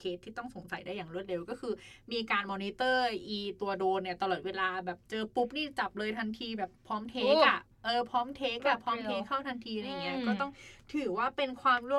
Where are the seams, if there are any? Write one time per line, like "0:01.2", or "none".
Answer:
0:07.7